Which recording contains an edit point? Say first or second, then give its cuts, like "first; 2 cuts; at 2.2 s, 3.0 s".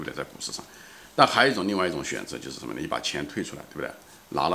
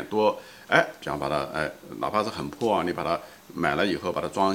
second; 1 cut; at 1.0 s